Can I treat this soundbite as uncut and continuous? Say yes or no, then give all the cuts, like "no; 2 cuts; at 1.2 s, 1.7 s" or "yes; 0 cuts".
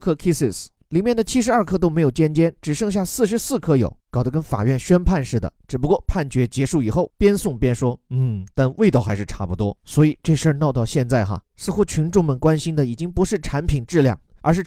no; 1 cut; at 7.1 s